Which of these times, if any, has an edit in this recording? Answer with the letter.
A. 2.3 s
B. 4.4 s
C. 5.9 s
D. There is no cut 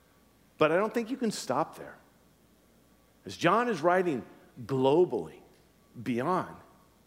D